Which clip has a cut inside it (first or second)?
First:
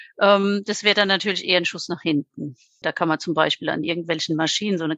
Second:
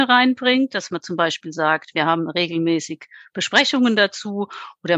first